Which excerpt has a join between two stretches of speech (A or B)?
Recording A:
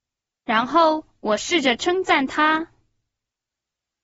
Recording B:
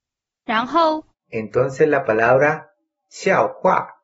B